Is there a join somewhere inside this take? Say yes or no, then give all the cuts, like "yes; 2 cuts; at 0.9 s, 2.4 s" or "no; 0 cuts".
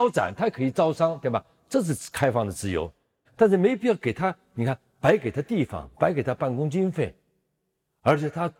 yes; 1 cut; at 3.2 s